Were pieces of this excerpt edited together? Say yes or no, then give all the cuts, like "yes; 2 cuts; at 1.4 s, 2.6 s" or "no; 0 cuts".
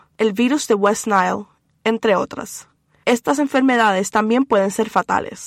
no; 0 cuts